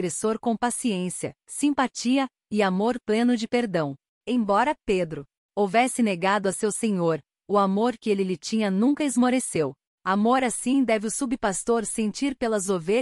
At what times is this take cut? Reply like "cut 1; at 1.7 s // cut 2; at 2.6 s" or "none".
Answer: none